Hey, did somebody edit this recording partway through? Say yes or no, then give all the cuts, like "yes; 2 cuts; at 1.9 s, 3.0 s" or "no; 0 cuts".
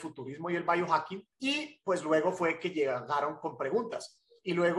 yes; 1 cut; at 1.3 s